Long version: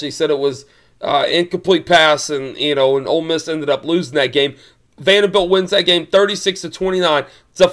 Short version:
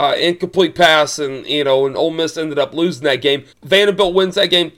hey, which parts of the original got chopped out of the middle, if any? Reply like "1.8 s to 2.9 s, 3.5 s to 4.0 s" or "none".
4.6 s to 4.9 s